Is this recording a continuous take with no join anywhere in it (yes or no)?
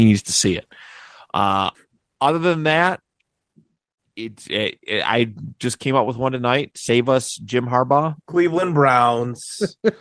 no